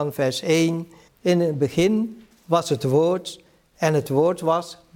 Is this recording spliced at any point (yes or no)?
yes